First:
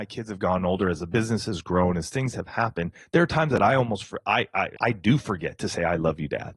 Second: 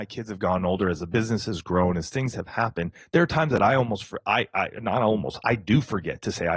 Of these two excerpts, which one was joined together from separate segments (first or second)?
first